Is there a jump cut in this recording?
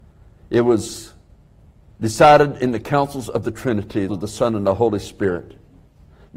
yes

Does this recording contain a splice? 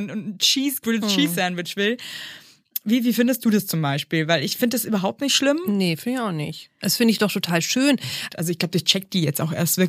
yes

